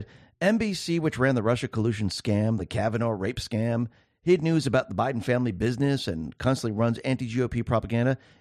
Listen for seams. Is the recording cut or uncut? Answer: uncut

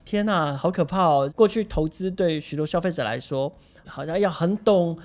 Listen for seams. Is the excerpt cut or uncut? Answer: cut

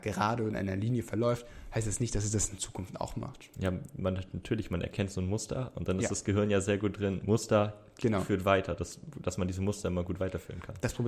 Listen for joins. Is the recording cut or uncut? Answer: uncut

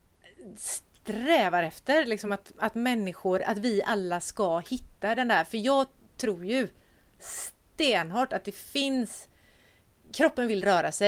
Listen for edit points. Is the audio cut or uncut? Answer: uncut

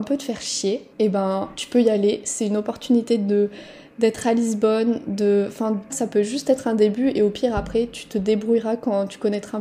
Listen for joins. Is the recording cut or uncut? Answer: cut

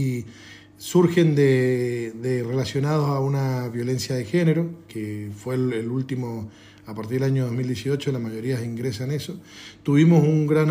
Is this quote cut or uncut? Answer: cut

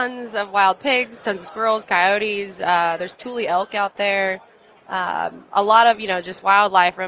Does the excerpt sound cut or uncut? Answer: uncut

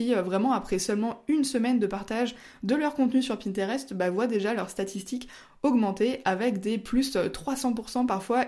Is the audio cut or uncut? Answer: uncut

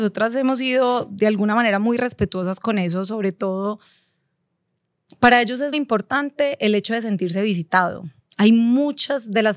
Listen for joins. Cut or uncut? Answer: cut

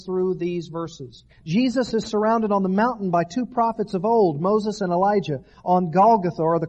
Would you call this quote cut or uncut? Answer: cut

